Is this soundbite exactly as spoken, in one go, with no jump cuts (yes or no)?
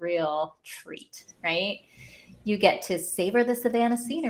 yes